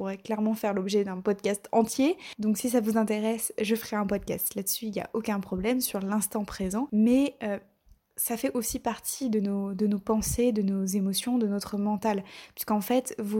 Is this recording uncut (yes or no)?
yes